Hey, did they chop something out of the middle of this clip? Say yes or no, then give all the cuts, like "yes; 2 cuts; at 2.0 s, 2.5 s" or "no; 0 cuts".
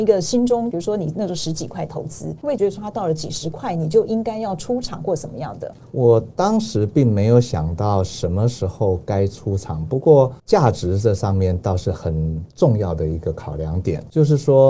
no; 0 cuts